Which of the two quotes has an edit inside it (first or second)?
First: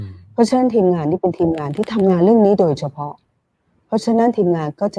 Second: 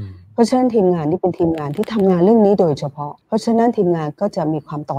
second